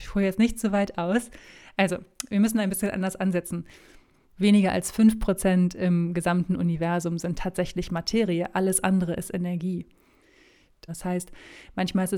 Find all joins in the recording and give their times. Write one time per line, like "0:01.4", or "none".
0:10.9

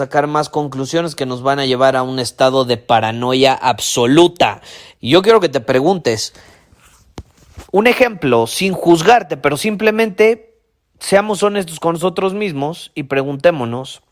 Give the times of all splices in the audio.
0:04.9

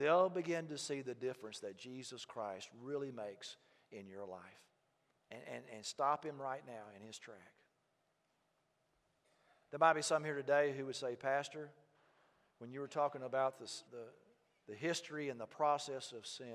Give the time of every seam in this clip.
0:05.1
0:13.9

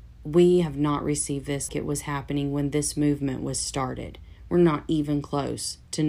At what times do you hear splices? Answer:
0:01.7

